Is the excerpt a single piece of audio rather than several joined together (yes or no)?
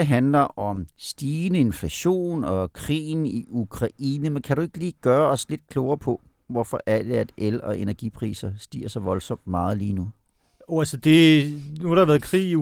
yes